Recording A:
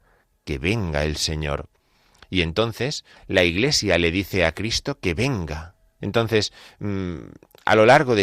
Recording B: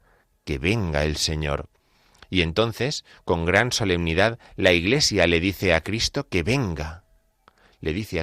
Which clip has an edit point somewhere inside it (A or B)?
A